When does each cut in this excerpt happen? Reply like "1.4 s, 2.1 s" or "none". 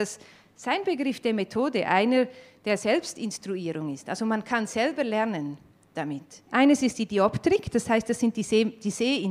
6.5 s